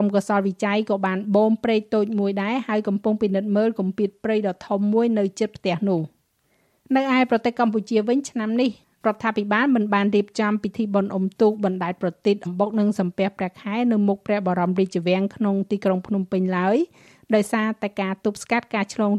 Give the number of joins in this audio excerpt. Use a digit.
1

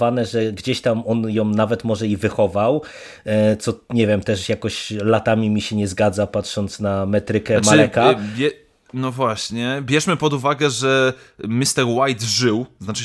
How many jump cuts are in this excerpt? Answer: 0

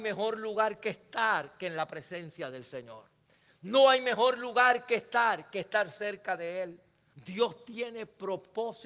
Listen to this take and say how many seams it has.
1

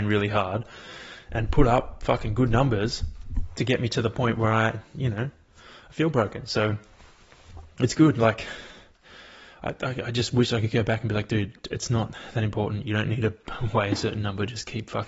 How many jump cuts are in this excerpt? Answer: 0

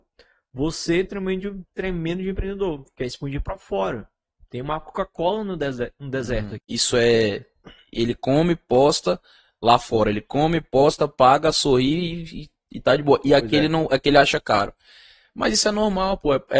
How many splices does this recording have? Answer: 1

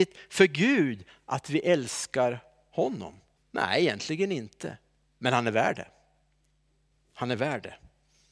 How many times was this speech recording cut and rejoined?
1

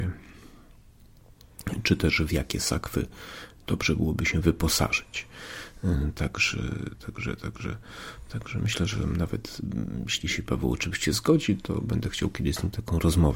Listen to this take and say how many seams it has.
0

